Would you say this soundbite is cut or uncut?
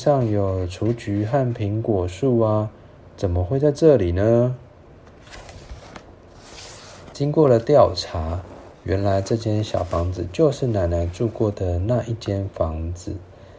uncut